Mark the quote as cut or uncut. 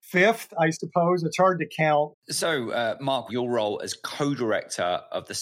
cut